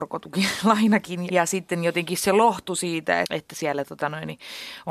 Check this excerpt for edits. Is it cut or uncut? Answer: cut